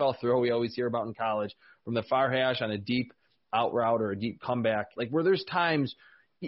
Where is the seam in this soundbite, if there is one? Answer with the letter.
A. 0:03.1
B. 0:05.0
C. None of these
B